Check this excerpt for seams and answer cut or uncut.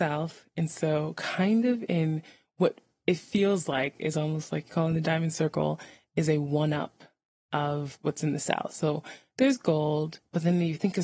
uncut